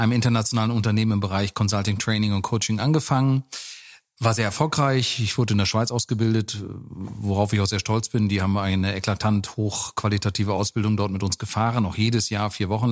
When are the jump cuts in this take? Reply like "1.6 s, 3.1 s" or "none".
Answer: none

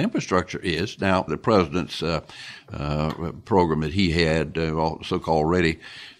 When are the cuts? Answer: 1.3 s

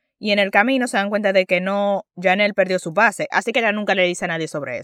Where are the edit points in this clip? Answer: 3.3 s

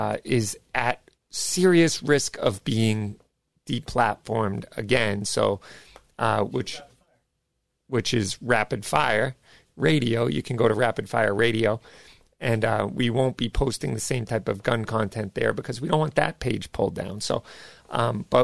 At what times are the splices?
6.5 s

